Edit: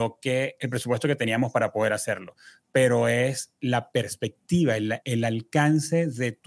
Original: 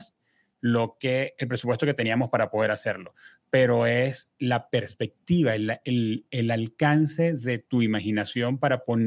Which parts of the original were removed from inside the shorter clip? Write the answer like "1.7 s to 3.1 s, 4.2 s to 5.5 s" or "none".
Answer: 5.8 s to 6.3 s